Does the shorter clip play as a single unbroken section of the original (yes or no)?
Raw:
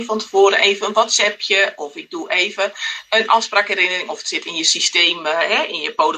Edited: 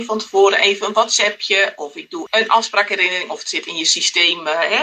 no